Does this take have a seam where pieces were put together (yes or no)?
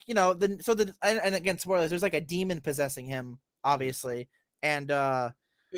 no